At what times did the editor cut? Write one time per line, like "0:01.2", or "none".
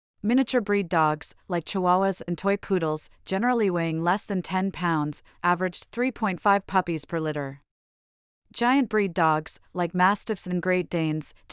0:05.3